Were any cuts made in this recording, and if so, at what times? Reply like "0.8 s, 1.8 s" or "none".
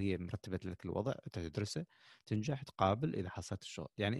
none